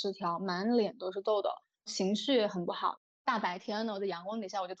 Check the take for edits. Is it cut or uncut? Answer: uncut